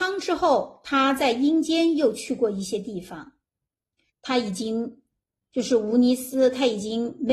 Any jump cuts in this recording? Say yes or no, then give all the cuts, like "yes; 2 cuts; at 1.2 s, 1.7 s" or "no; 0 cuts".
yes; 1 cut; at 4.1 s